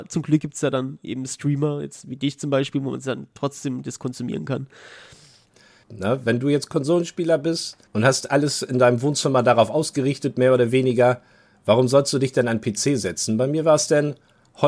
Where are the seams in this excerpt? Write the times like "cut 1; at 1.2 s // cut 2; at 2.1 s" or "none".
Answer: cut 1; at 5.8 s // cut 2; at 7.9 s